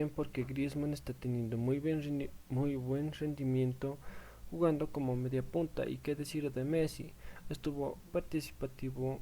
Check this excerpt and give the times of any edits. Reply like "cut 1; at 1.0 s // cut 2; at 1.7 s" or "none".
cut 1; at 8.1 s